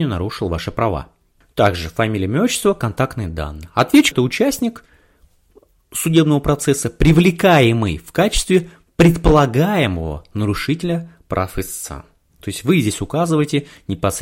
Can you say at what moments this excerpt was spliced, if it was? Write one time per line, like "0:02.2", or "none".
0:01.4
0:04.1

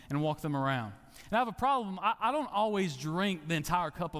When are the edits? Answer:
none

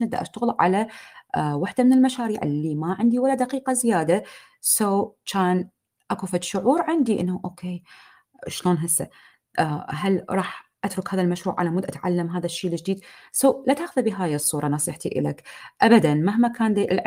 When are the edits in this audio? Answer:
none

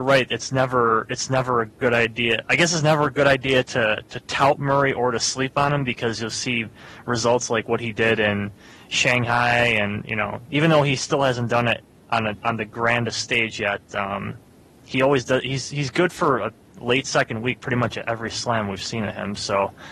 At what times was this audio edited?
none

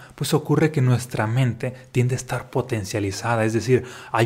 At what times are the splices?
none

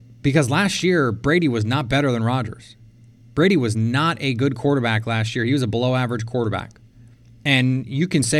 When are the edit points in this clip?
none

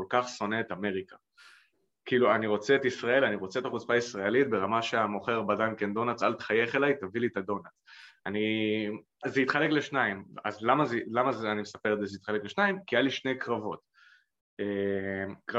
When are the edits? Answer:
0:09.2

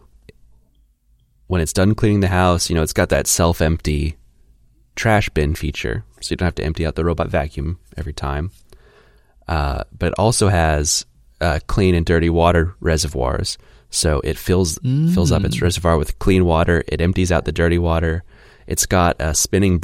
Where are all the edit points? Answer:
none

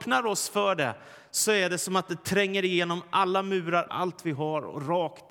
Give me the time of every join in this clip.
0:03.9

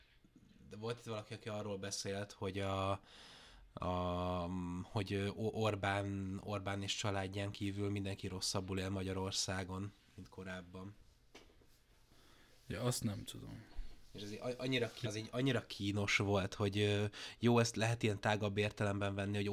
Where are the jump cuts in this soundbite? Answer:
0:15.0

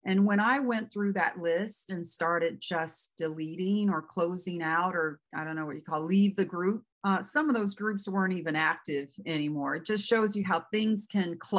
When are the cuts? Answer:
0:06.9

